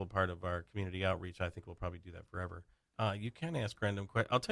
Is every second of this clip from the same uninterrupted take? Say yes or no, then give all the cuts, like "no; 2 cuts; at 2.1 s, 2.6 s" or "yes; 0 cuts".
no; 1 cut; at 2.9 s